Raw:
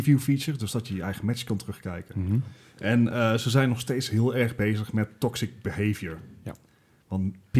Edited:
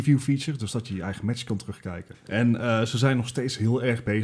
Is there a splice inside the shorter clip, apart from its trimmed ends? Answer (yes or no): yes